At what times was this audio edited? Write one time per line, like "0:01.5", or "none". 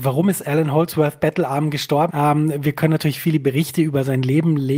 0:02.1